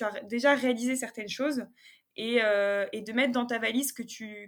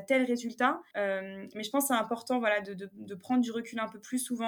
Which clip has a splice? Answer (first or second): second